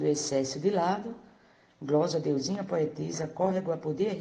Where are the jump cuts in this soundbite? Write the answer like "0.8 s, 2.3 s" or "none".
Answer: 1.7 s